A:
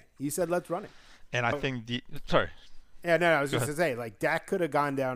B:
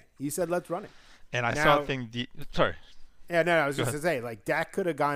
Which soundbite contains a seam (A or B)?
A